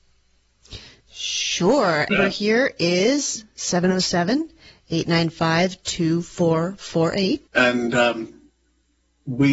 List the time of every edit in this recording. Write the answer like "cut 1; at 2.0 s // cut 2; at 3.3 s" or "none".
cut 1; at 2.1 s // cut 2; at 7.5 s